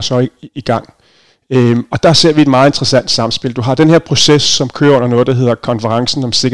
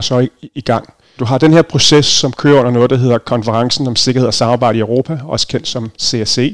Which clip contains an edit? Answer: second; 1 cut; at 1.2 s

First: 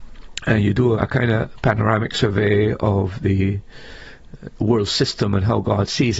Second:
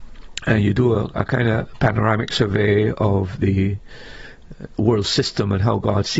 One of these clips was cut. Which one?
first; 1 cut; at 1.0 s

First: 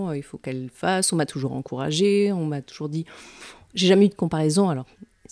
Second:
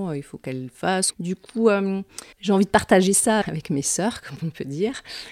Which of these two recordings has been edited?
second; 3 cuts; at 1.1 s, 2.3 s, 3.4 s

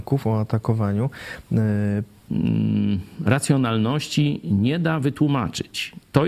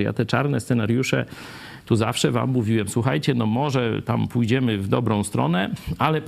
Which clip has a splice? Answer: first; 1 cut; at 2.3 s

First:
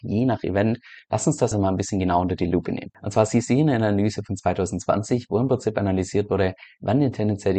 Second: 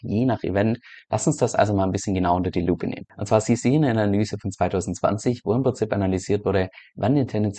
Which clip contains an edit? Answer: first; 1 cut; at 1.5 s

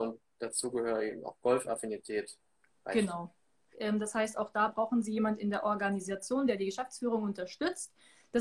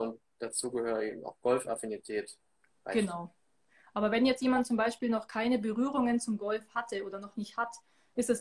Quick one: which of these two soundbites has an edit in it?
first; 1 cut; at 3.7 s

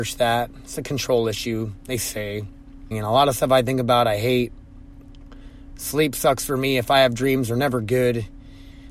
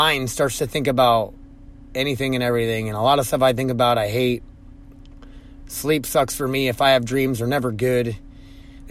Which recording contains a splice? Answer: first; 1 cut; at 2.9 s

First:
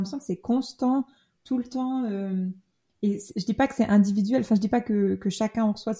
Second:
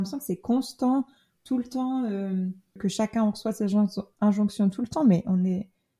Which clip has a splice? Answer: second; 1 cut; at 2.8 s

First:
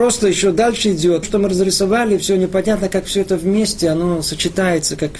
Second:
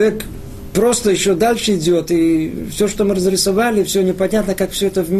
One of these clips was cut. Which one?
first; 1 cut; at 1.2 s

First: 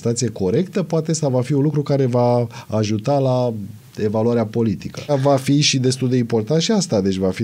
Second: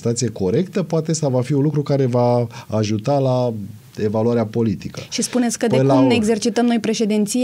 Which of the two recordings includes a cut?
first; 1 cut; at 5.1 s

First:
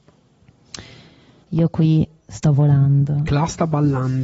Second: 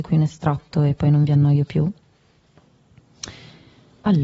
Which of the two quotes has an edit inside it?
first; 1 cut; at 1.4 s

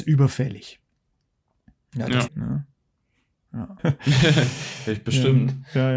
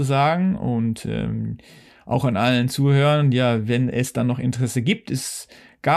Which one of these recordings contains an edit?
first; 2 cuts; at 2.3 s, 3.8 s

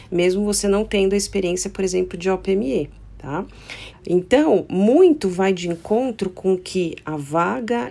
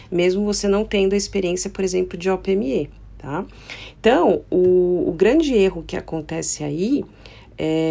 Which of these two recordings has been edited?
first; 1 cut; at 3.9 s

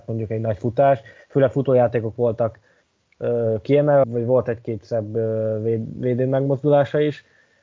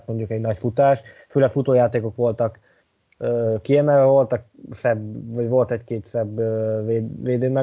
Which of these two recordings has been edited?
first; 1 cut; at 4.0 s

